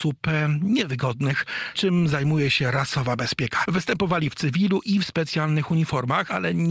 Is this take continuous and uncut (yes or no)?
no